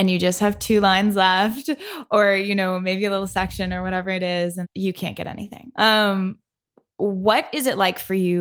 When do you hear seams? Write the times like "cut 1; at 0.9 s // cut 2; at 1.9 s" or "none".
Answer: cut 1; at 4.6 s // cut 2; at 5.7 s